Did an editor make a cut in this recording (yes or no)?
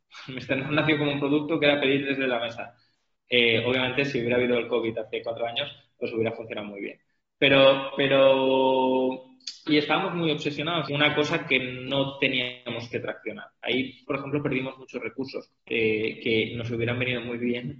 yes